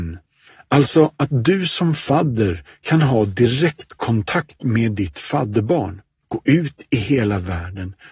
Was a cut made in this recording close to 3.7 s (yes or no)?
no